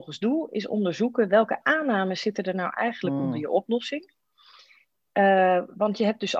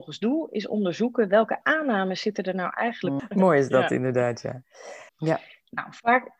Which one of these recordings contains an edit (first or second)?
second